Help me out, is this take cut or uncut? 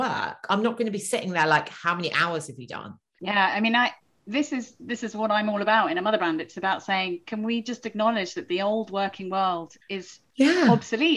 uncut